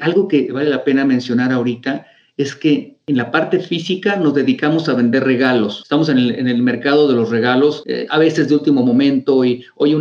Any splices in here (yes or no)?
no